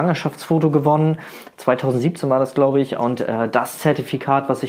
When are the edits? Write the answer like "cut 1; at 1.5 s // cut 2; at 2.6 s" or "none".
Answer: none